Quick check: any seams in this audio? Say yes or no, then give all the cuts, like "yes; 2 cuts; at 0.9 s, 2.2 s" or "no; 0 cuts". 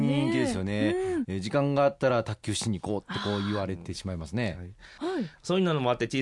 yes; 2 cuts; at 1.2 s, 5.0 s